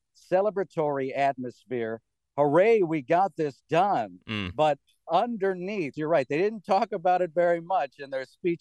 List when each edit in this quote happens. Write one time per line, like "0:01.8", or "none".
0:05.9

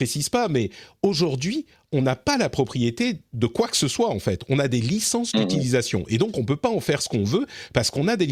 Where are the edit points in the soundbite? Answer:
none

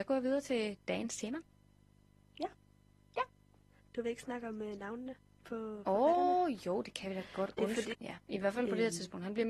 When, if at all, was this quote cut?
0:07.9

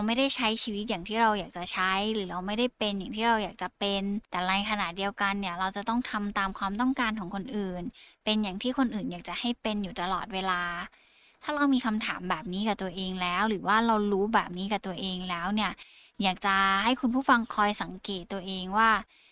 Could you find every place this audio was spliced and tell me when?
0:04.2

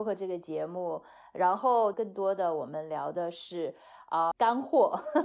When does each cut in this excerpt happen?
0:01.9
0:04.3

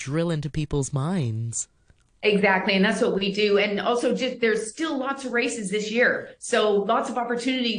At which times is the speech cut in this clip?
none

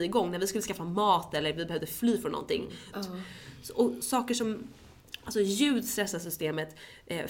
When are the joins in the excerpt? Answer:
0:02.9

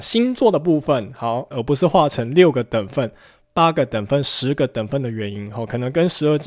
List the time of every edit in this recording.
0:01.5

